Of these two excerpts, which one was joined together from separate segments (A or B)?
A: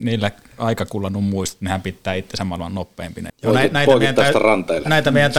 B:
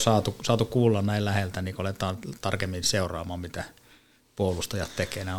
A